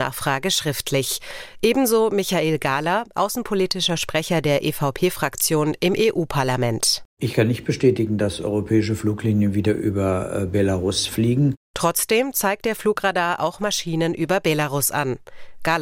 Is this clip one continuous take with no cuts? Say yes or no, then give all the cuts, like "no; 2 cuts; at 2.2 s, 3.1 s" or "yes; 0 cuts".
yes; 0 cuts